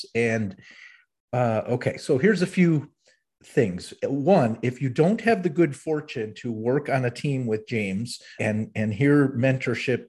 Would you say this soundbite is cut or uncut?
cut